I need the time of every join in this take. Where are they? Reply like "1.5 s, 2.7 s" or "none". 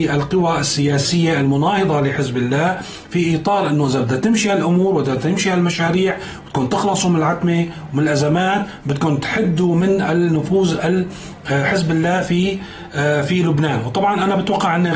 none